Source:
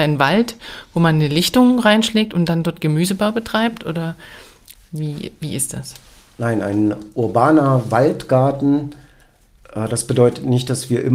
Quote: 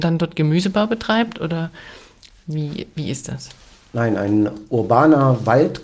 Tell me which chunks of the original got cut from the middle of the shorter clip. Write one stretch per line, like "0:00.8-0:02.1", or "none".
none